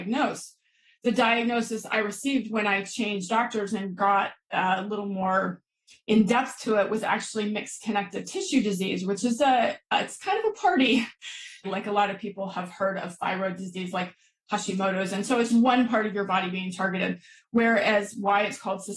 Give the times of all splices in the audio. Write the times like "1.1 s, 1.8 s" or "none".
11.6 s, 15.5 s